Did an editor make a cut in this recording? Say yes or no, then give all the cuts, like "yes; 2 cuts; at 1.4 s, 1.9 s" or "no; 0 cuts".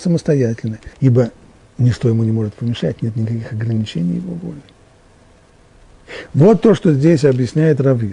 yes; 1 cut; at 0.9 s